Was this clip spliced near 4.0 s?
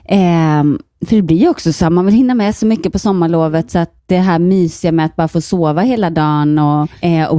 yes; 1 cut; at 4.0 s

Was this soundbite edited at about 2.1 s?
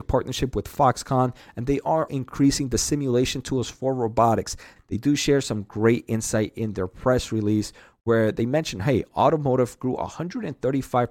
yes; 2 cuts; at 2.1 s, 4.8 s

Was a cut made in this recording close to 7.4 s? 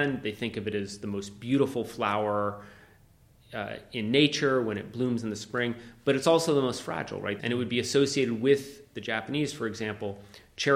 yes; 1 cut; at 7.4 s

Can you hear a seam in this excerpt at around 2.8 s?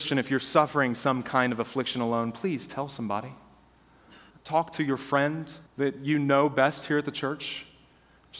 no; 2 cuts; at 4.3 s, 5.7 s

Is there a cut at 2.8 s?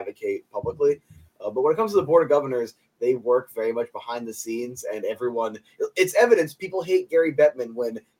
no; 0 cuts

